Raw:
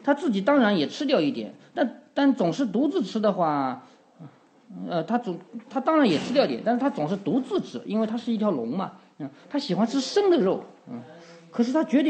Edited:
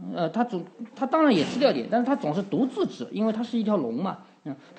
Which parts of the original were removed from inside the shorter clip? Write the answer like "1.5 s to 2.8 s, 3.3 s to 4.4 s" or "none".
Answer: none